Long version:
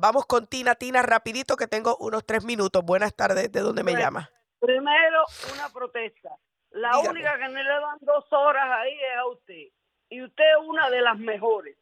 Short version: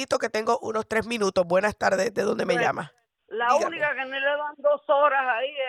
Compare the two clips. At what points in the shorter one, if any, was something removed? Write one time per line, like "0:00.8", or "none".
0:03.2